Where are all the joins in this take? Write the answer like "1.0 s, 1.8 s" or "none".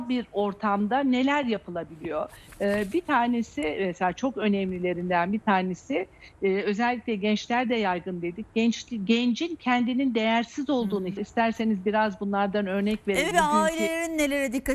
11.2 s, 13.3 s